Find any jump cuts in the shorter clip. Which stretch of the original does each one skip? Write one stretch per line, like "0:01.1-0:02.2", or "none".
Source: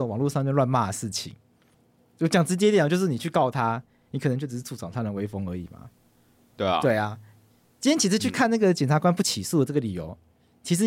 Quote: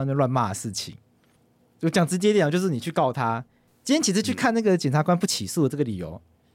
0:04.1-0:07.6

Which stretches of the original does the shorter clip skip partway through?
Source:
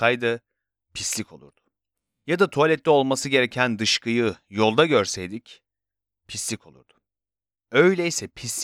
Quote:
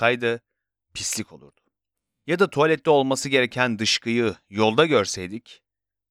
none

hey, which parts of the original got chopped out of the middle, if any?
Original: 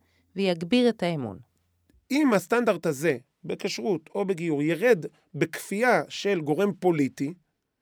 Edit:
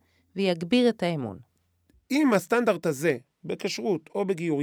none

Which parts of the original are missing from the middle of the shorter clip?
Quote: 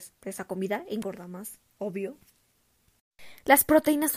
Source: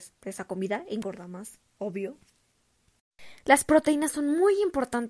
none

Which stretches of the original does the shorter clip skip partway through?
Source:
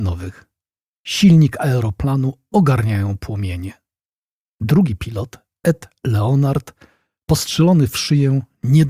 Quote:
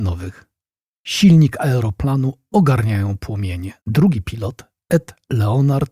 0:03.8-0:04.5

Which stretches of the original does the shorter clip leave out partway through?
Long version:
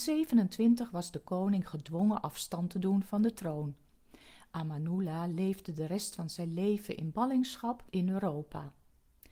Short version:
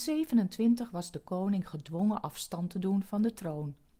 none

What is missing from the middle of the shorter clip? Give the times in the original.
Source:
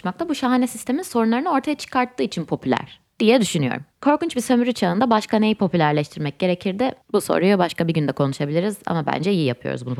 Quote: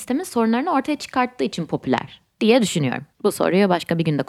0:03.9-0:07.0

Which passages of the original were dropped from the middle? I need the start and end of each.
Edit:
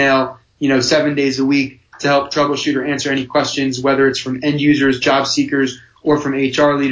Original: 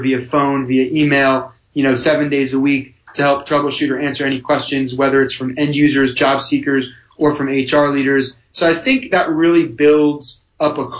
none

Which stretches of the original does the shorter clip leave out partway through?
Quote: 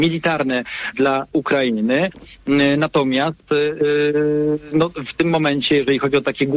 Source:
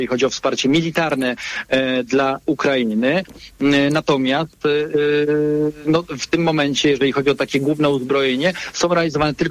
0:01.6-0:02.1

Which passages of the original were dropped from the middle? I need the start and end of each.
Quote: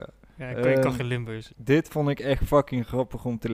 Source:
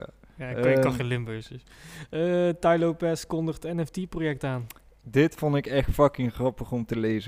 0:01.5-0:05.0

